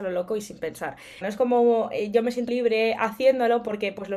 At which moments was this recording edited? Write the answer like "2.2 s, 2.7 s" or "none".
1.2 s, 2.5 s